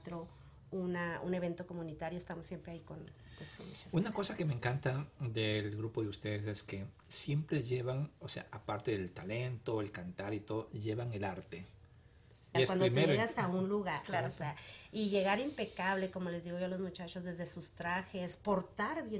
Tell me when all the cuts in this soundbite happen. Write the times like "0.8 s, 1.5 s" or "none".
12.5 s